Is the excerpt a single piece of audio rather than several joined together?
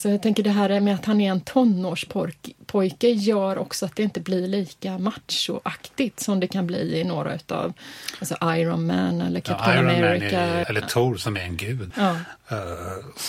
no; 2 cuts; at 10.6 s, 11.9 s

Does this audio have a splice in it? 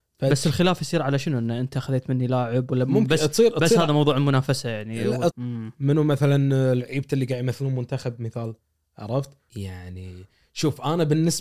yes; 2 cuts; at 5.3 s, 9.5 s

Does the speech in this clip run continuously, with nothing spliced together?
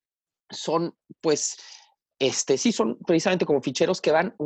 yes; 0 cuts

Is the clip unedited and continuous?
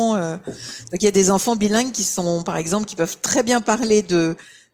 yes; 0 cuts

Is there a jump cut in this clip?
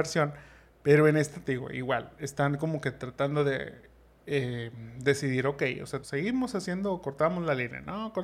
yes; 1 cut; at 6.0 s

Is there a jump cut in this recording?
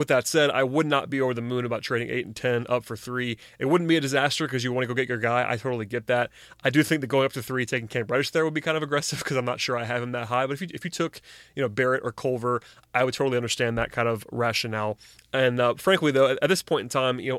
no; 0 cuts

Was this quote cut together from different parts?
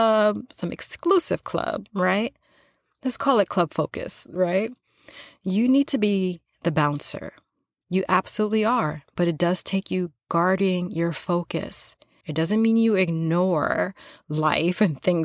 yes; 2 cuts; at 7.8 s, 12.2 s

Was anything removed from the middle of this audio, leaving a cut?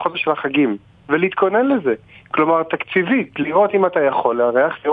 no; 0 cuts

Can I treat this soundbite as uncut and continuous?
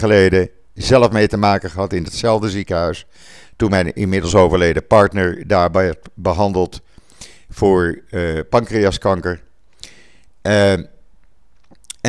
yes; 0 cuts

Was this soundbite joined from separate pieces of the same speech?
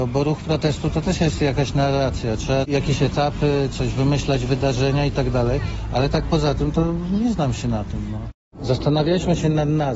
no; 0 cuts

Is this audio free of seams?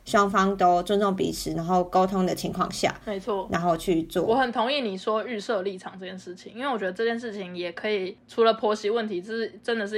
yes; 0 cuts

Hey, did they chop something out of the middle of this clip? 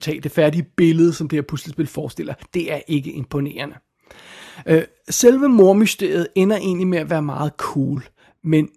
no; 0 cuts

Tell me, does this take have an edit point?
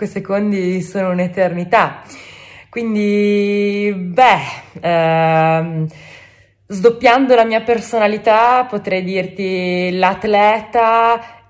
no; 0 cuts

